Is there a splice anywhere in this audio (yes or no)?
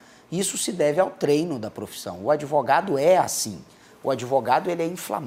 no